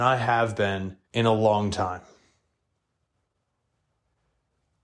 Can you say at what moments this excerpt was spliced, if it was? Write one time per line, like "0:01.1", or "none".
0:01.1